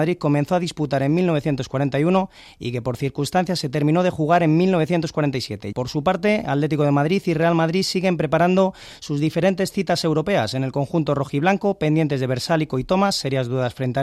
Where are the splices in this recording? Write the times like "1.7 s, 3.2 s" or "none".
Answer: 5.7 s